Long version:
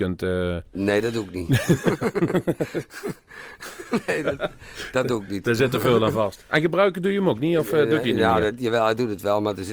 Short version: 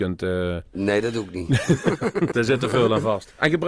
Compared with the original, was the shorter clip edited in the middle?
yes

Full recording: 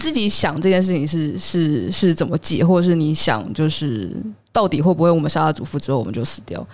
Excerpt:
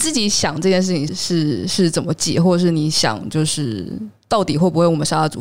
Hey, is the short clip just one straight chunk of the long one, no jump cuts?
no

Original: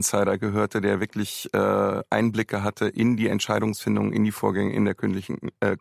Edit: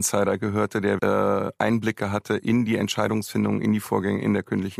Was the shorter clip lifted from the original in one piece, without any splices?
no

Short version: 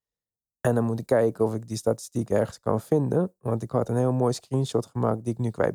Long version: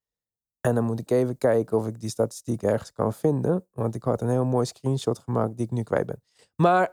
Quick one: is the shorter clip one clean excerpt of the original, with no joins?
no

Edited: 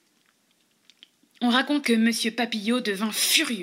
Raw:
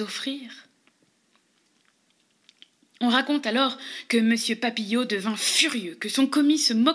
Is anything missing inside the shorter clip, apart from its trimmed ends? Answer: yes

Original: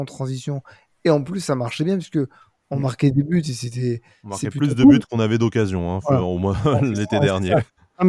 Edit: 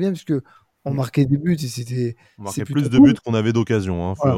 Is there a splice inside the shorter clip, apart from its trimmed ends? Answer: no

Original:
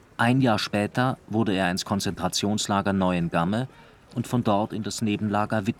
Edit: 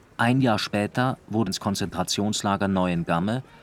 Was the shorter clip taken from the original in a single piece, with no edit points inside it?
no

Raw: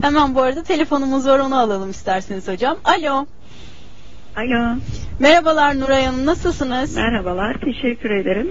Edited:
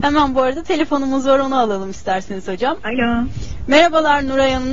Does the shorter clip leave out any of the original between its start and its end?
yes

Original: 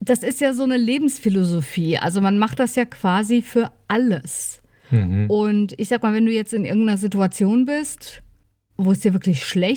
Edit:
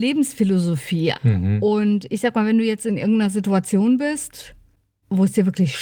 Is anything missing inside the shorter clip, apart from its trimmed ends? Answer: yes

